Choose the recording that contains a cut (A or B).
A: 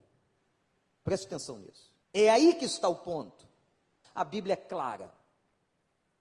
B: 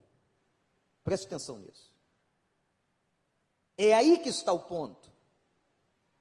A